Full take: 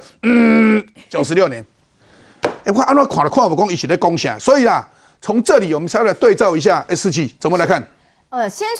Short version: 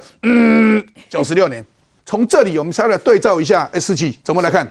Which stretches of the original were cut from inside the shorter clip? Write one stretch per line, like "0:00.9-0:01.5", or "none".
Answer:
0:02.0-0:05.1